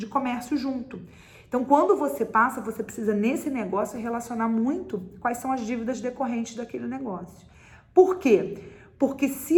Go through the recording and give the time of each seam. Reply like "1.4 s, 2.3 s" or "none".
none